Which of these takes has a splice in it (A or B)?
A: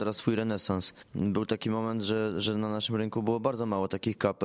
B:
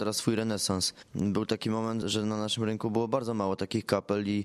B